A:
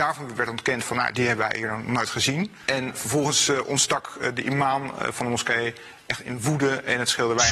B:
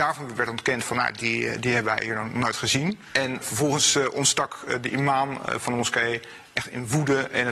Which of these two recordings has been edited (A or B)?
A